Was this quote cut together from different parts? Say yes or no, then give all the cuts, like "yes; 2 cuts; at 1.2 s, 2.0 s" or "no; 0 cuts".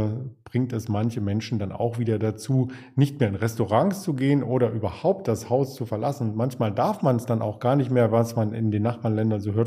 no; 0 cuts